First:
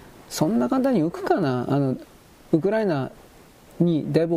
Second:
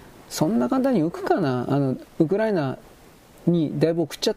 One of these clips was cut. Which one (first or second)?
second